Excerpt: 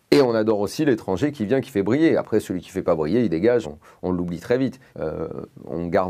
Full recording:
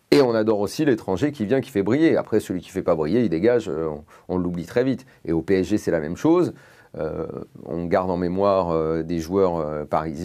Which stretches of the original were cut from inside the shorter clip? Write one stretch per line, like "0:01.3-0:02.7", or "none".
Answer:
0:03.6-0:03.9
0:05.2-0:06.9